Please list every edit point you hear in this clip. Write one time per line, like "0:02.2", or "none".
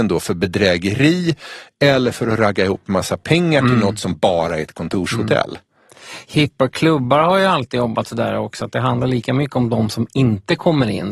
none